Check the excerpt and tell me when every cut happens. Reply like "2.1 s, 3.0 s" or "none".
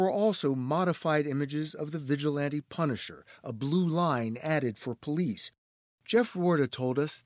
none